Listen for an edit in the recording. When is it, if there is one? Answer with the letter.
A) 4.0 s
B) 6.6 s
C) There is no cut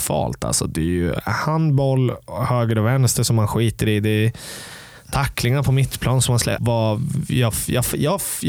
B